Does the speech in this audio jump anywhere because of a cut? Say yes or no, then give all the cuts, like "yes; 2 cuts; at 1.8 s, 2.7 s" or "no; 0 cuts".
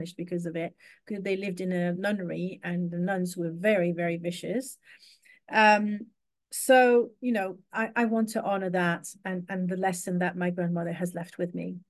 no; 0 cuts